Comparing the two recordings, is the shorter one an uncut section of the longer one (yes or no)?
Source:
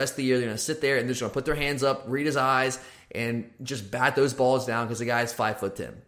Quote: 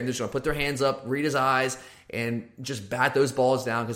yes